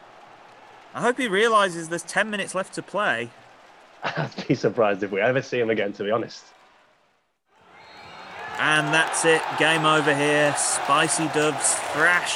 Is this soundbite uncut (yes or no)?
yes